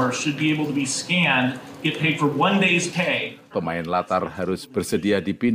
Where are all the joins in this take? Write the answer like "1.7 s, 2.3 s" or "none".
3.5 s